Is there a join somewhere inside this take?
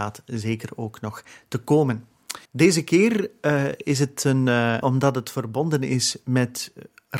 yes; 2 cuts; at 2.5 s, 4.8 s

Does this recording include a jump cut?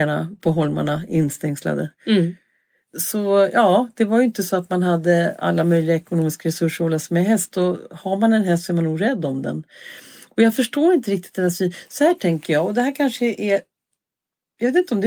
no; 0 cuts

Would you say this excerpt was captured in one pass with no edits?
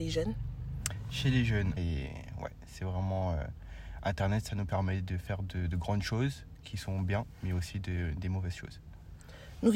no; 1 cut; at 1.8 s

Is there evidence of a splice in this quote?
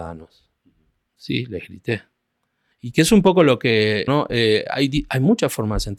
yes; 2 cuts; at 2.7 s, 4.1 s

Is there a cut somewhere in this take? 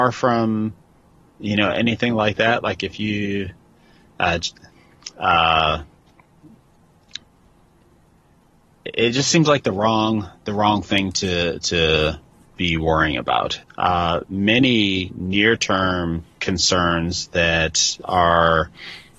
yes; 2 cuts; at 13.6 s, 18.0 s

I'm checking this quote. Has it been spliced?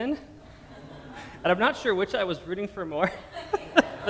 no; 0 cuts

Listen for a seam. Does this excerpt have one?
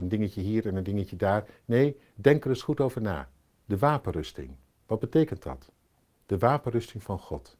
no; 0 cuts

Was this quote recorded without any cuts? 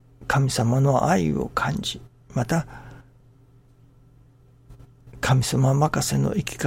yes; 0 cuts

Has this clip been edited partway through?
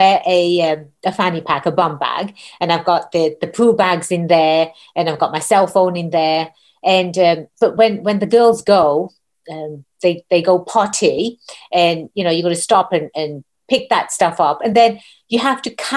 no; 0 cuts

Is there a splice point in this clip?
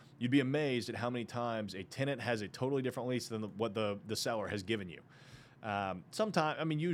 no; 0 cuts

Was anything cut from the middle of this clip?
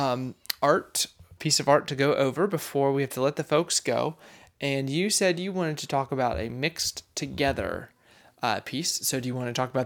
yes; 1 cut; at 1.4 s

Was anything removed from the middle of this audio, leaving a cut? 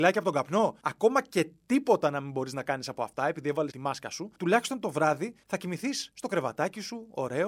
yes; 1 cut; at 3.7 s

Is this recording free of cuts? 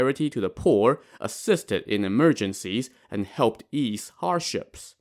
yes; 0 cuts

